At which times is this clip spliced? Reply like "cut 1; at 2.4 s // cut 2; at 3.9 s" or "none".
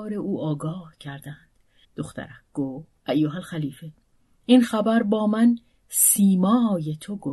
cut 1; at 1.8 s // cut 2; at 3.0 s